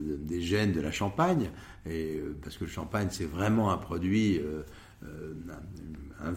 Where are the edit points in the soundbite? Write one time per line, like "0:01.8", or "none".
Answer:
none